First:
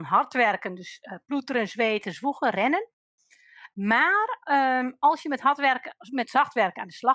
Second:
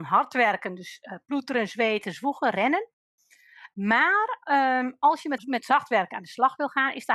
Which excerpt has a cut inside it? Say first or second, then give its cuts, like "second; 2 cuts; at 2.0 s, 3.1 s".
second; 1 cut; at 5.4 s